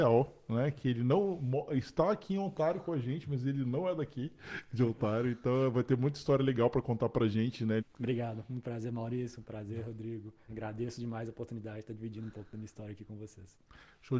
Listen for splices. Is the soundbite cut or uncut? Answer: cut